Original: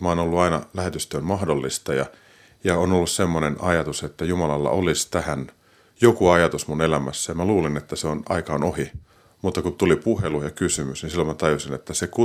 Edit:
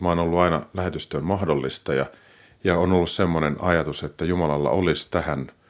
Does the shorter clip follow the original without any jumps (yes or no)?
yes